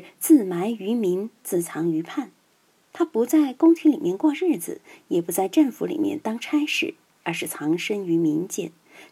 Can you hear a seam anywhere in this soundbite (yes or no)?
no